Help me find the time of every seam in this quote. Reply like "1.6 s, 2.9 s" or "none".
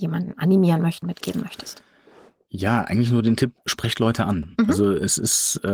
1.0 s